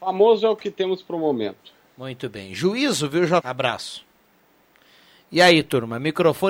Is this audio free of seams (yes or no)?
no